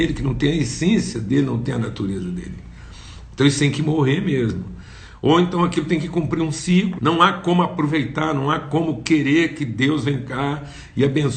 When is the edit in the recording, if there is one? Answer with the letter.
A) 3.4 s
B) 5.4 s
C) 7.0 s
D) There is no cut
C